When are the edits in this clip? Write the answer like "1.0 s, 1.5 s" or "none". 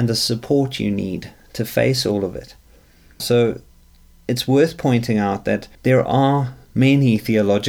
3.2 s, 5.8 s